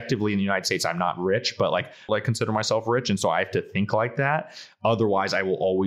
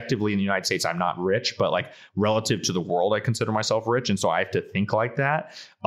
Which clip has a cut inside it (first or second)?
first